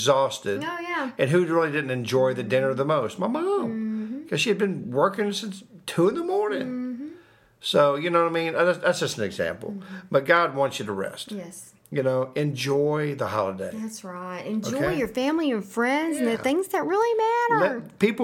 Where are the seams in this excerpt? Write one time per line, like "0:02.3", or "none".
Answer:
none